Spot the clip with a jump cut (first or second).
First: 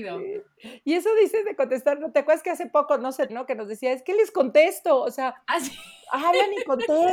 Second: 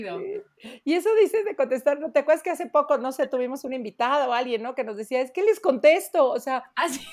first